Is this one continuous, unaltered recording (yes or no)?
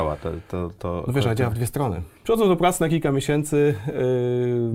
no